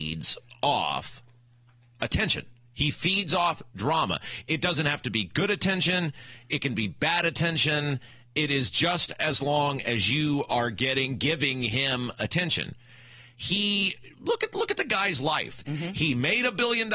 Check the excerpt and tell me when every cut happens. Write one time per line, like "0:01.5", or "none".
0:14.1
0:15.6